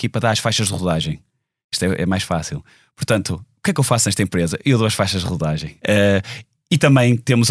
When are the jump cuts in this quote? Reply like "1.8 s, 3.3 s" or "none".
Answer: 5.8 s